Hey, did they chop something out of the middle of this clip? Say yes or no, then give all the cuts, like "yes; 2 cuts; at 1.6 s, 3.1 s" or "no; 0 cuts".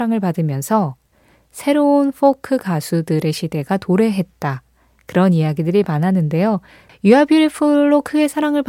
yes; 1 cut; at 6.9 s